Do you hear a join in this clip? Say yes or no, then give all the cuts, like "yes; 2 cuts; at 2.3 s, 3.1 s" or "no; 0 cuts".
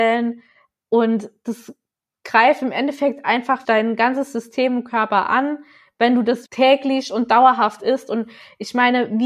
yes; 2 cuts; at 3.6 s, 6.5 s